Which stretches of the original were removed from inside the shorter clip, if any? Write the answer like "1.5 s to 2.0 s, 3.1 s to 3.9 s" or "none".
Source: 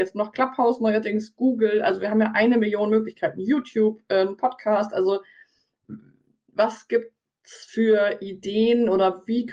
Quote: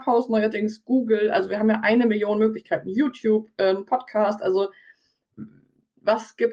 none